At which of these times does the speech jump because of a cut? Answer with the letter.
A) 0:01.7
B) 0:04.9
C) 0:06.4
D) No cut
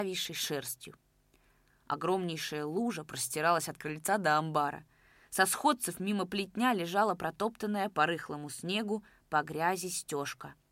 A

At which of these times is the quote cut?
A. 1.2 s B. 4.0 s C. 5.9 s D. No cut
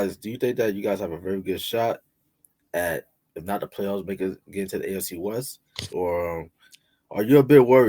C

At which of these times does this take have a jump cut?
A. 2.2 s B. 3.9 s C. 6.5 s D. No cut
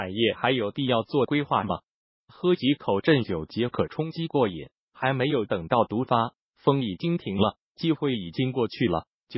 D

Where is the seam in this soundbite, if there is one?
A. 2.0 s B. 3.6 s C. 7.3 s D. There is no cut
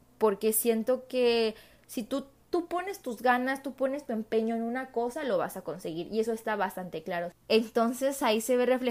C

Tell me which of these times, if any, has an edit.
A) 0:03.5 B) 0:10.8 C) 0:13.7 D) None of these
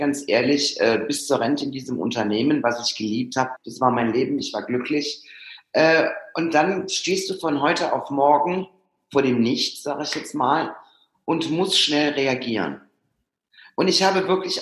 A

